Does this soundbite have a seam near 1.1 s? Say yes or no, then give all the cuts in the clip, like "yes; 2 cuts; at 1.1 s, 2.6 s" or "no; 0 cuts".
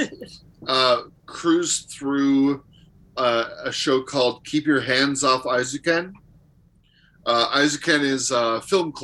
yes; 1 cut; at 1.1 s